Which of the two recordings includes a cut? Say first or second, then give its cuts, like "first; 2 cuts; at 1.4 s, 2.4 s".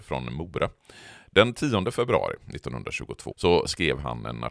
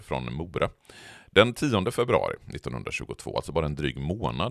first; 1 cut; at 3.3 s